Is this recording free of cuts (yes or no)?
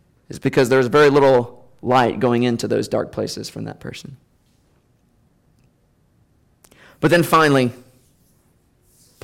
yes